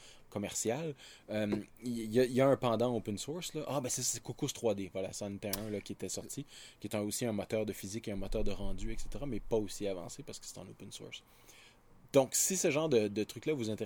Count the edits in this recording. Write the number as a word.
zero